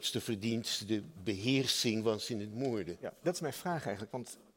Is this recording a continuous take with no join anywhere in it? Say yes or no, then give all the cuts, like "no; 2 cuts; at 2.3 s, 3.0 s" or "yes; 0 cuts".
yes; 0 cuts